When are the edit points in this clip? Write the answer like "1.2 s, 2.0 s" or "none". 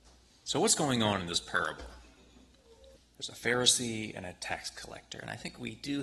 3.0 s